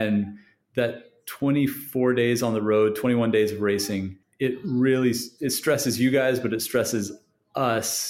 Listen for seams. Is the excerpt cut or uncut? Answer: uncut